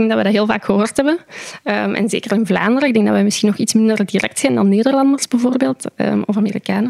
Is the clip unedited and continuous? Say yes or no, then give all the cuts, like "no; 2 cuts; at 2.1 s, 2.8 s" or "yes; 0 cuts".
yes; 0 cuts